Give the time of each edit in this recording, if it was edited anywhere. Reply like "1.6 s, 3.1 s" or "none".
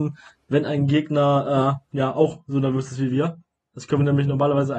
1.9 s